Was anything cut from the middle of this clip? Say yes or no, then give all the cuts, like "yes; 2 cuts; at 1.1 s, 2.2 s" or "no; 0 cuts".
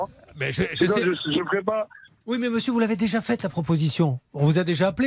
yes; 1 cut; at 2.2 s